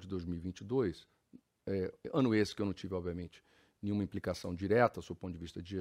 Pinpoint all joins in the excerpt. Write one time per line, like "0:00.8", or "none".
none